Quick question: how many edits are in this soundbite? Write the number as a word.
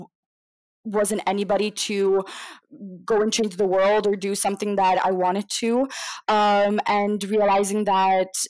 zero